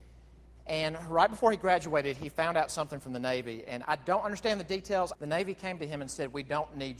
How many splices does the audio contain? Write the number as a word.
two